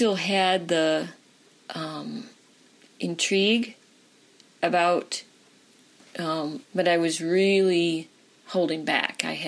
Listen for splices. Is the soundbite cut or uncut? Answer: cut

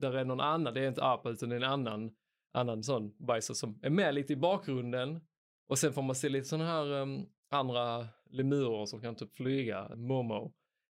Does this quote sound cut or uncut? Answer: cut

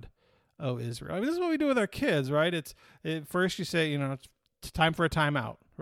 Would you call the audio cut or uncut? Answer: uncut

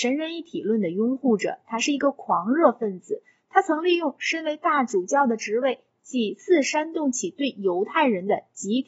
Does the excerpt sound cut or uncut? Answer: uncut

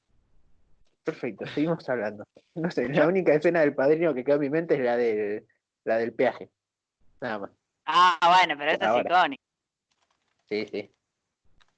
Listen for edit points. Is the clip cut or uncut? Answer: uncut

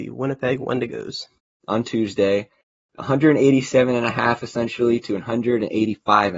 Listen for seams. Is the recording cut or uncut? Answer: cut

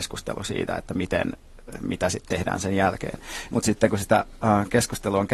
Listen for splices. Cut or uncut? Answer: cut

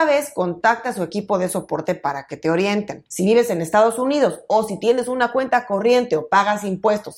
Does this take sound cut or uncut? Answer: cut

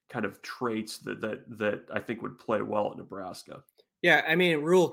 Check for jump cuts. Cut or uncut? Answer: uncut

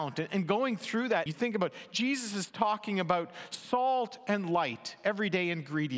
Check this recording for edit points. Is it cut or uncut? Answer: cut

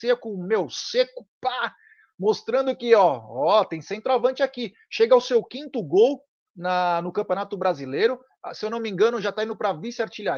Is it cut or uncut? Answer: uncut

